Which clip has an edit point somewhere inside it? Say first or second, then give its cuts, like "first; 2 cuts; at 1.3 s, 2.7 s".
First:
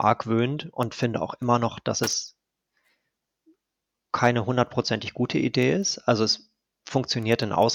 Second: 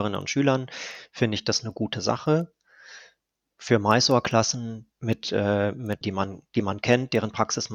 second; 2 cuts; at 4.9 s, 6.0 s